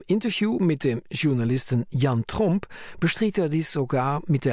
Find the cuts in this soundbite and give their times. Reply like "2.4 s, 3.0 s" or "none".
none